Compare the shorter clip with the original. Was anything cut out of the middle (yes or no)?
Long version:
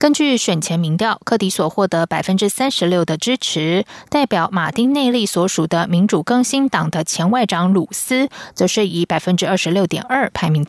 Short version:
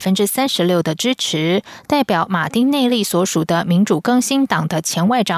no